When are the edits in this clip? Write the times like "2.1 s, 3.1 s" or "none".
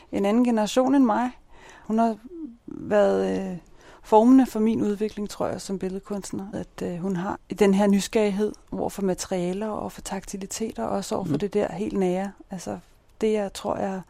6.5 s